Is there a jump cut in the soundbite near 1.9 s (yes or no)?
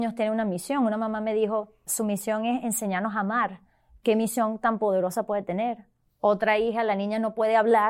yes